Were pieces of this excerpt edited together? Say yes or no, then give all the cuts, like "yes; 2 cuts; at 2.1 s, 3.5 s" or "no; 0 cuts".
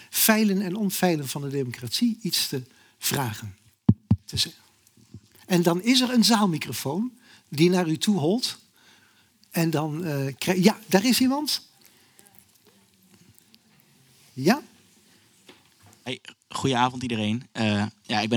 no; 0 cuts